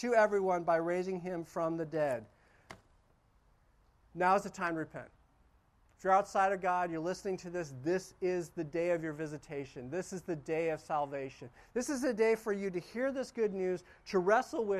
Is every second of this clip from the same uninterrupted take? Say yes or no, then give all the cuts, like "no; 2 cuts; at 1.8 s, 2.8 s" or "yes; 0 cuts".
yes; 0 cuts